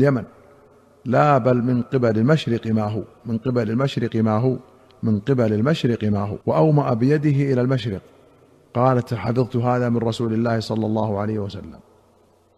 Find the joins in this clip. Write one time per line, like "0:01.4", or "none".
0:06.4